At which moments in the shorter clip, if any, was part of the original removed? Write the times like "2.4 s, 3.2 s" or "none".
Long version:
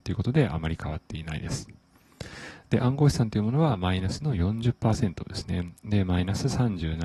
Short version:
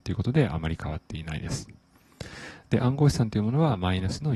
none